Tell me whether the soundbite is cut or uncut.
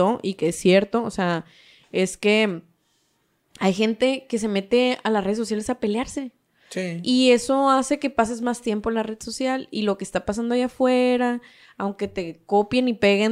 uncut